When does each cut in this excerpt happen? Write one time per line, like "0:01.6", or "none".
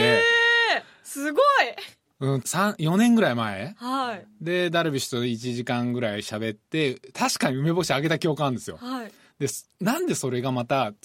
0:02.4